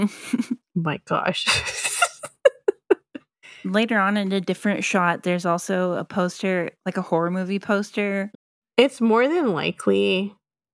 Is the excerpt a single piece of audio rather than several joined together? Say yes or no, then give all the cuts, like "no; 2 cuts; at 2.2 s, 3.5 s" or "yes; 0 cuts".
no; 1 cut; at 8.3 s